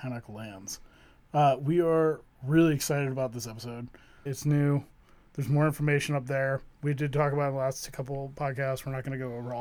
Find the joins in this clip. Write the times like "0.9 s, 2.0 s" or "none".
4.3 s